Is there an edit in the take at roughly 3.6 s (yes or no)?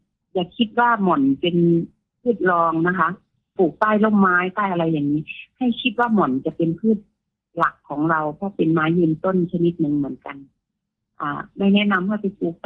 yes